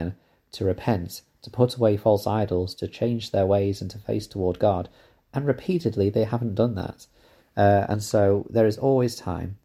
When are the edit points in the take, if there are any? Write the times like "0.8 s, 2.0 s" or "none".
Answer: none